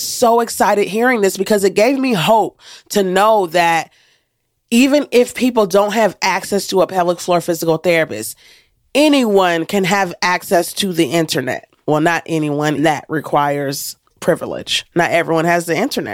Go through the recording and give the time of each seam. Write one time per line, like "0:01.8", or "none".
0:12.8
0:14.1